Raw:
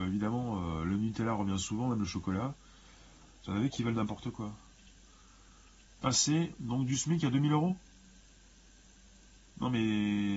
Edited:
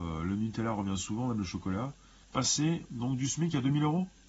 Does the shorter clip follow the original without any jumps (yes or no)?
no